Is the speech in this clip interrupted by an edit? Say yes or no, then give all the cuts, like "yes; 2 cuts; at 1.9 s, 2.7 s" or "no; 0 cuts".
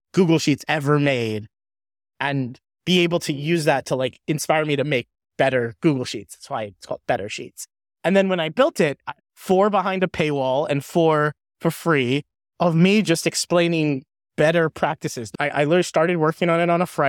yes; 1 cut; at 9.2 s